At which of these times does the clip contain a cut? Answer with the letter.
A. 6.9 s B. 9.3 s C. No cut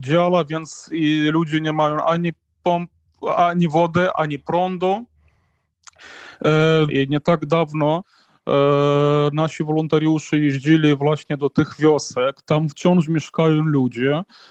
A